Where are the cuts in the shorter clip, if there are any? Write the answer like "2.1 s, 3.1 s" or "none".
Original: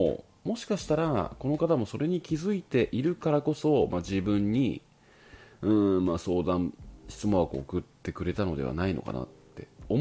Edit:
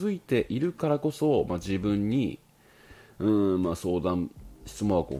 none